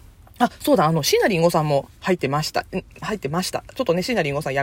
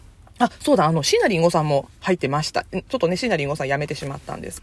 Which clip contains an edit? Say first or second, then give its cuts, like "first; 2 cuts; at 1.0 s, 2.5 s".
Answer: second; 1 cut; at 2.9 s